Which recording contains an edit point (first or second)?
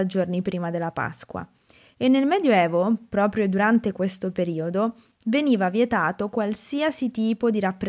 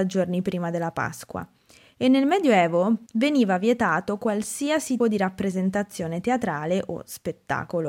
second